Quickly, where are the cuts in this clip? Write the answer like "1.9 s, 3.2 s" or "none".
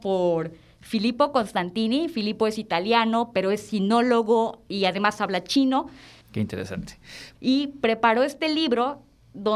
6.2 s, 7.3 s